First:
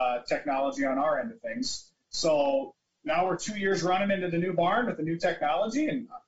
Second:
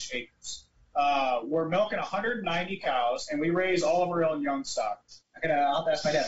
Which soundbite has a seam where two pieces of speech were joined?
second; 1 cut; at 5.2 s

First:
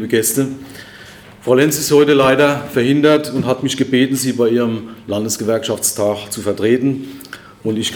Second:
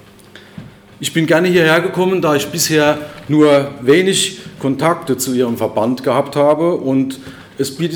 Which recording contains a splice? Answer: second; 1 cut; at 0.9 s

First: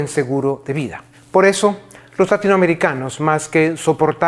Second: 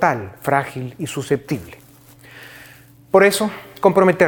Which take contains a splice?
first; 1 cut; at 1.1 s

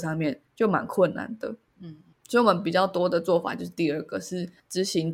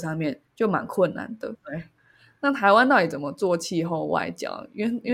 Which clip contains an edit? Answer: second; 1 cut; at 1.5 s

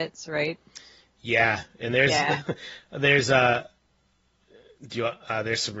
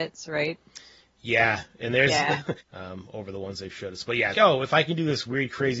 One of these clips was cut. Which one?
second; 2 cuts; at 2.6 s, 4.3 s

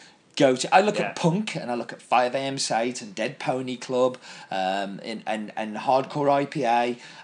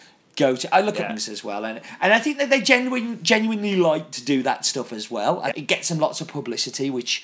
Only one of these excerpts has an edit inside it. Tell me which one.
second; 2 cuts; at 1.1 s, 5.5 s

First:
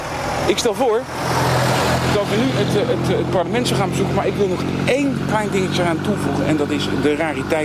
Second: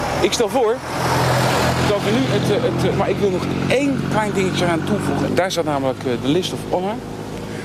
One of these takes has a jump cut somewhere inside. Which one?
second; 2 cuts; at 2.9 s, 5.3 s

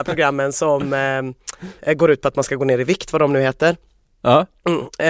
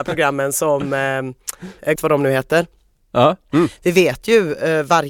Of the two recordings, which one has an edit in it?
second; 2 cuts; at 2.0 s, 3.5 s

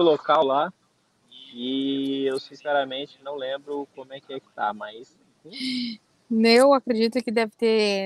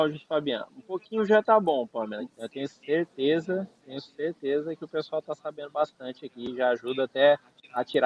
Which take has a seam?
second; 1 cut; at 2.3 s

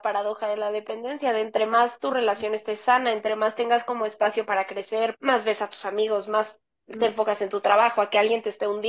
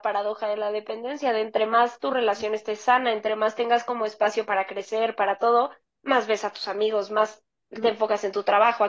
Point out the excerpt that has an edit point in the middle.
first; 1 cut; at 5.1 s

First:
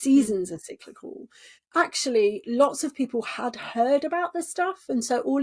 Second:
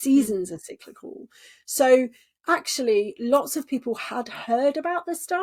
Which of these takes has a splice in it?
first; 1 cut; at 1.6 s

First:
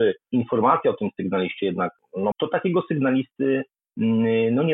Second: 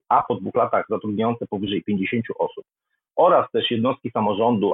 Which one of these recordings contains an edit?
first; 1 cut; at 2.3 s

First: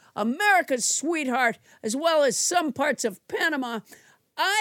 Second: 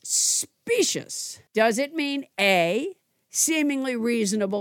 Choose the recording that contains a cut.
second; 1 cut; at 1.5 s

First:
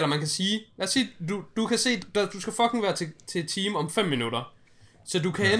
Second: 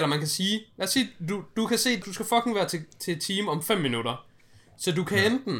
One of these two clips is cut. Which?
second; 1 cut; at 2.0 s

